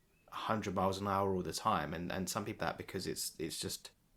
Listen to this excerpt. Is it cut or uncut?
cut